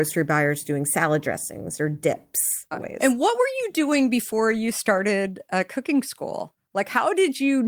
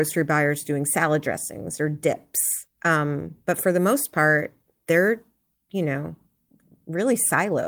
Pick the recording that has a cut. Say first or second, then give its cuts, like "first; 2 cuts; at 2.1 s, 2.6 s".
first; 1 cut; at 2.7 s